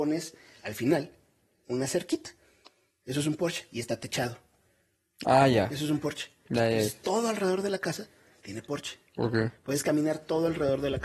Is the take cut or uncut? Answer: uncut